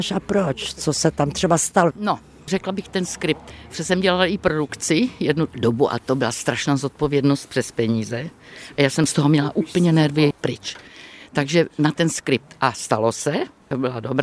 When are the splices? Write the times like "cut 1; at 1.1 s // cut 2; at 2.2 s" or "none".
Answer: cut 1; at 1.9 s